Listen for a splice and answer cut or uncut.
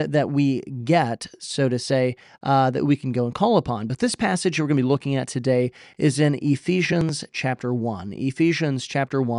uncut